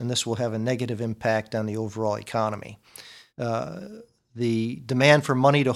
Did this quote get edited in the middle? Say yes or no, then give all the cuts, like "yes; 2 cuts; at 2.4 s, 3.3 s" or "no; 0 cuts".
yes; 1 cut; at 3.3 s